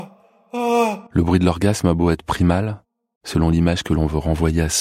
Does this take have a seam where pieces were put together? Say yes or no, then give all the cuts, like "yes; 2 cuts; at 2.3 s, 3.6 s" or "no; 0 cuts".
yes; 2 cuts; at 1.1 s, 3.2 s